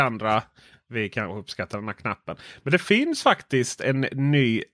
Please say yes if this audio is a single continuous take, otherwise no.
yes